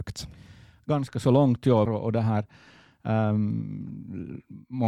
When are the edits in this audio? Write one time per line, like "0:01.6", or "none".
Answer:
0:01.9